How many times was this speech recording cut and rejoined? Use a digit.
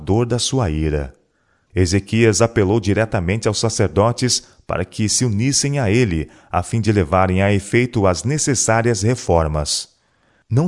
1